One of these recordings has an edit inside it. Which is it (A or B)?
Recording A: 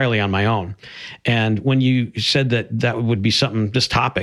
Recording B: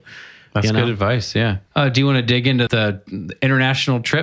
B